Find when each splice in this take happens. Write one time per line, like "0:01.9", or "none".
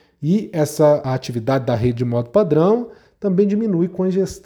0:01.0